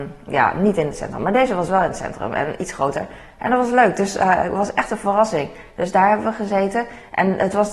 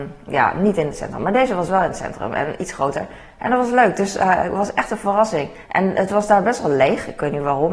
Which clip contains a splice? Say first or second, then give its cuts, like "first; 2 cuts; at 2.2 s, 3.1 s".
second; 1 cut; at 5.6 s